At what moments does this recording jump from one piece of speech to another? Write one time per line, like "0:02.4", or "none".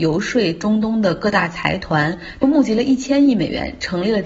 0:02.4